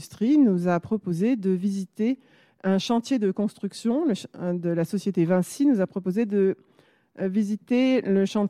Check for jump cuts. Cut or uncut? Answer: uncut